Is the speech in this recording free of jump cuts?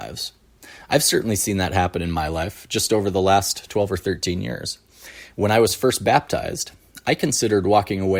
yes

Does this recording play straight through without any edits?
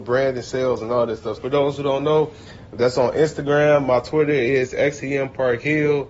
no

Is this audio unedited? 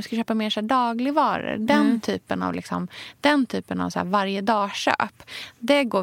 yes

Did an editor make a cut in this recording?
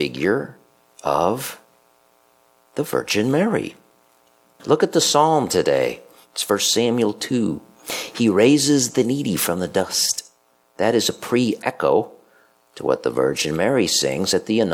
yes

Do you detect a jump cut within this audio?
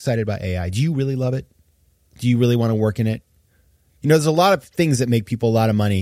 no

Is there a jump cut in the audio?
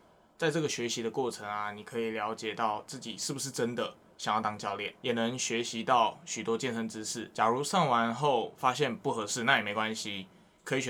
no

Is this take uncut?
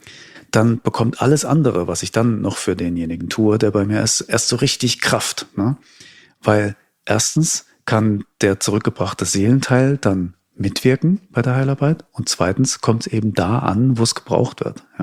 yes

